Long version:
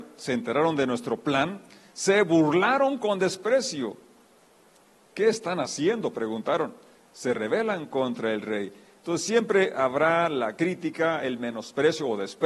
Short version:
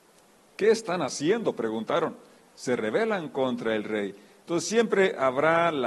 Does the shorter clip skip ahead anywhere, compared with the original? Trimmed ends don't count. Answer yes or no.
no